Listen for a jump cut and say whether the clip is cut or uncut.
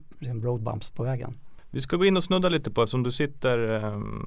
uncut